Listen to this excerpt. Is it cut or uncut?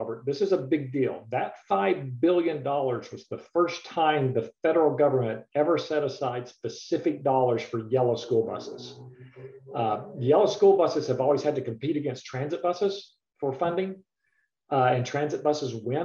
uncut